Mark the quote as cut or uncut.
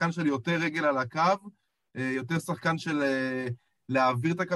uncut